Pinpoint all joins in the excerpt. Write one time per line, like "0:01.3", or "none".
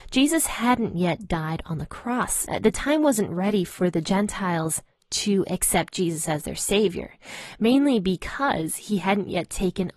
none